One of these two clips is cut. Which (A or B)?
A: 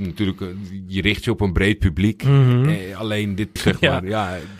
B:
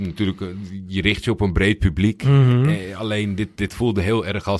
A